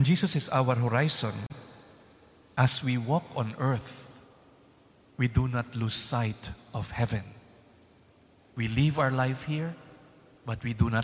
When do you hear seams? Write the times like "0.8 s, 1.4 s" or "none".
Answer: 8.4 s